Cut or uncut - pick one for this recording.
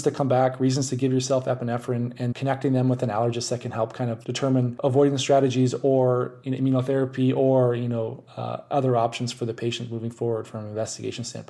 cut